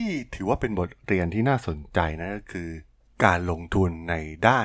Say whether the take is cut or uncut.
uncut